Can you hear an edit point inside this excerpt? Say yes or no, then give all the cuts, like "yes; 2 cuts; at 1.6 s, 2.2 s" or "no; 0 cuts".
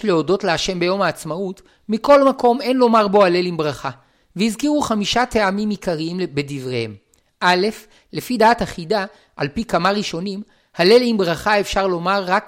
no; 0 cuts